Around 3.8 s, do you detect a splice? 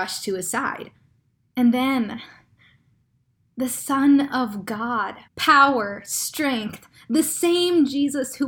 no; 2 cuts; at 1.4 s, 5.3 s

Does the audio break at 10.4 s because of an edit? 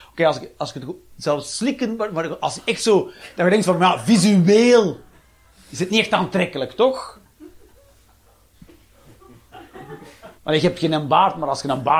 yes; 1 cut; at 10.4 s

